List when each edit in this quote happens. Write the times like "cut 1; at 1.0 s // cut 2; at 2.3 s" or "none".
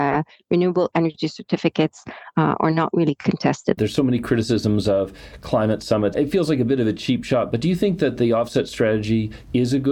cut 1; at 3.8 s // cut 2; at 6.1 s

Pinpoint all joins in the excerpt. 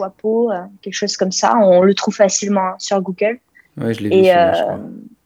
none

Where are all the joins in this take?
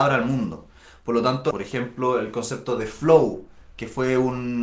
cut 1; at 1.5 s

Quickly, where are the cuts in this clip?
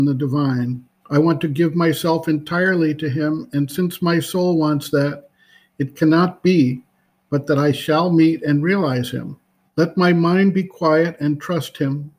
cut 1; at 1.0 s // cut 2; at 9.7 s

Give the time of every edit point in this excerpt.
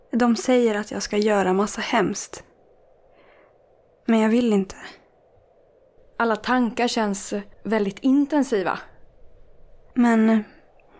cut 1; at 6.0 s // cut 2; at 7.5 s // cut 3; at 9.9 s

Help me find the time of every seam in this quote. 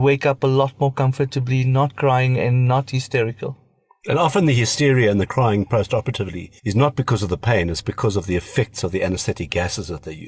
cut 1; at 6.6 s

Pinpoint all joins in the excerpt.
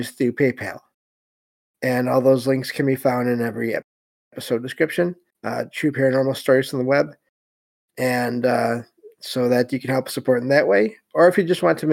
cut 1; at 5.3 s

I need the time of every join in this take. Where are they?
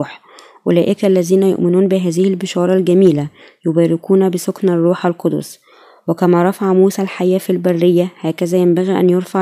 none

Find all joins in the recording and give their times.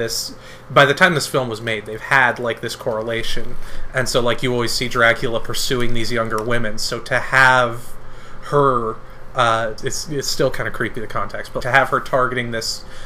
cut 1; at 9.8 s // cut 2; at 11.6 s

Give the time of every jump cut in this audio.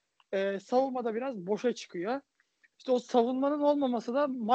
cut 1; at 2.7 s

